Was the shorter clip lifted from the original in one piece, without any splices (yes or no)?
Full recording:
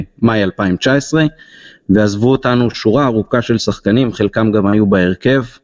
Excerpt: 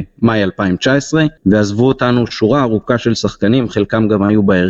no